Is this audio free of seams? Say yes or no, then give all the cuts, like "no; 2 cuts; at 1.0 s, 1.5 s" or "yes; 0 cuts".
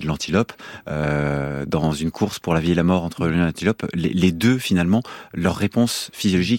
yes; 0 cuts